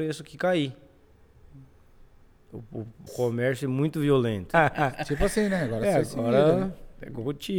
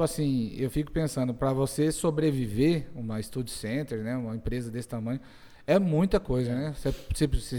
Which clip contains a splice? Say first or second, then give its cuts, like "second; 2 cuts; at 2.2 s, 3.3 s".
first; 2 cuts; at 3.1 s, 4.5 s